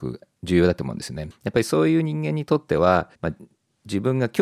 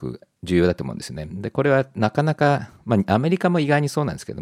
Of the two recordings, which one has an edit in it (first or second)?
first